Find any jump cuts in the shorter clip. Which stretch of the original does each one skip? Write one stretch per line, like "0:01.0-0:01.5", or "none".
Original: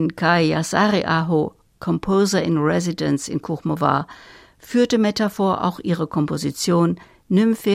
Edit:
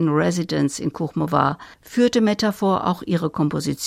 0:04.2-0:04.5